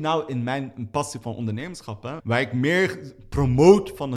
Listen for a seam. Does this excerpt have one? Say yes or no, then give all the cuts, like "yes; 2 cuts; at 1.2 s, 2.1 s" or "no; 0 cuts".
yes; 1 cut; at 2.2 s